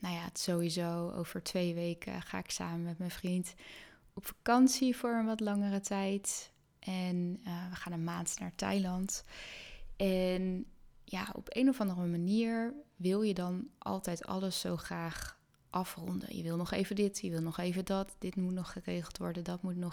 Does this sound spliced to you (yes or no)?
no